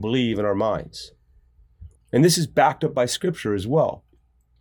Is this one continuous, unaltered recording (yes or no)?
no